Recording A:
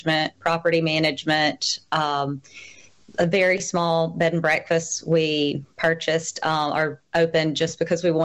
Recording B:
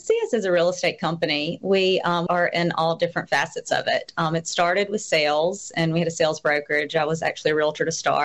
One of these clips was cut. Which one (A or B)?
B